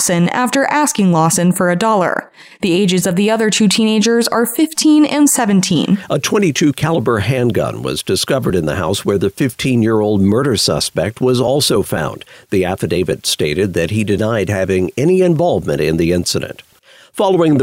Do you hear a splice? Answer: no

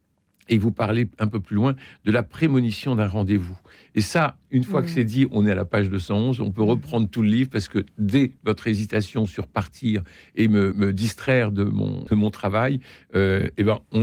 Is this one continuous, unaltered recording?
no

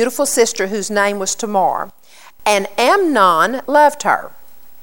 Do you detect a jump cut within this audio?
yes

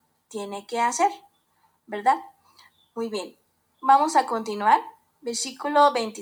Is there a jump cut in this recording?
no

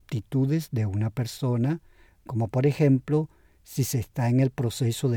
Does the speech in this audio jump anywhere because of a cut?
no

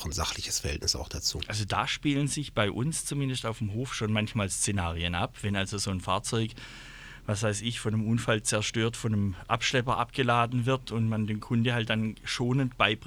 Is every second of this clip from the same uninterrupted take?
yes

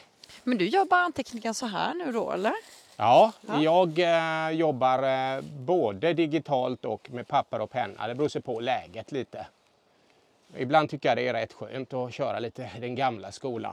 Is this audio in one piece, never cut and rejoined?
yes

